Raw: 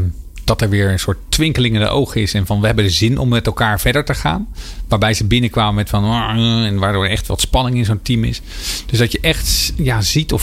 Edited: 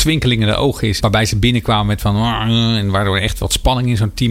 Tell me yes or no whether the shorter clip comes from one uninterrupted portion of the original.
no